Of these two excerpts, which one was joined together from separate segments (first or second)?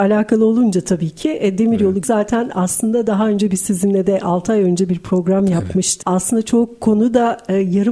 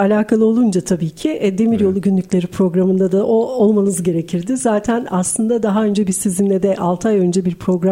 first